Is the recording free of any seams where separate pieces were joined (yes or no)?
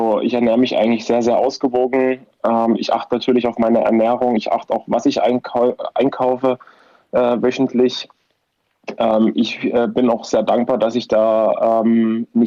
yes